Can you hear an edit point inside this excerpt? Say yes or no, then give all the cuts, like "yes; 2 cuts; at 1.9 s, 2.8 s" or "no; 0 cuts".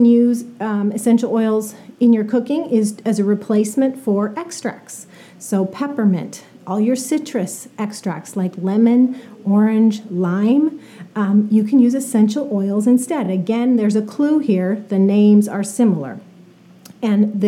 no; 0 cuts